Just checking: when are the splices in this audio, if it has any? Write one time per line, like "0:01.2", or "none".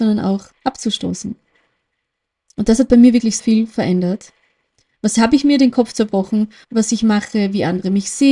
0:03.4
0:06.6